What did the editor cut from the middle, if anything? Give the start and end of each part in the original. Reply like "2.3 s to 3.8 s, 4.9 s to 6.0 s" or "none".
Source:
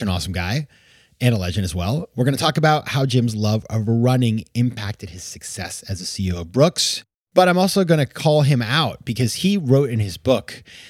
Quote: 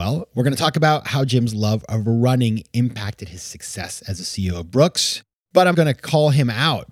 7.5 s to 7.9 s